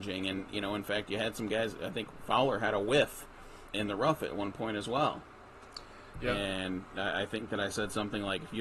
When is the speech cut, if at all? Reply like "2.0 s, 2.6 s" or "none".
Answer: 3.7 s, 6.1 s